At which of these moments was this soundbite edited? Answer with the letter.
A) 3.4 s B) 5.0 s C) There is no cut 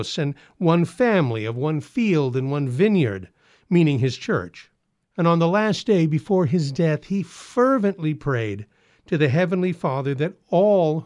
B